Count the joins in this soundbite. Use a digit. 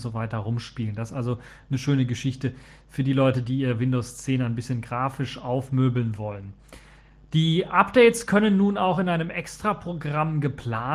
0